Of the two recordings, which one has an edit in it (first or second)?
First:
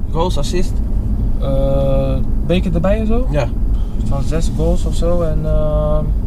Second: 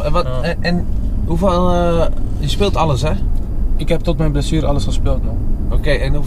first